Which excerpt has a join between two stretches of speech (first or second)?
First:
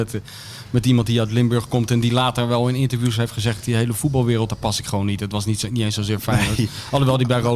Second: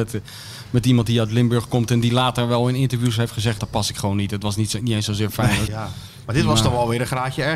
second